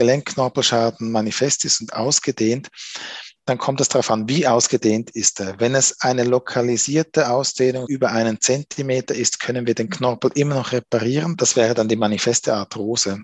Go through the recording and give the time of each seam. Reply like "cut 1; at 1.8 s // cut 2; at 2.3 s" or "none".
cut 1; at 7.9 s // cut 2; at 11.3 s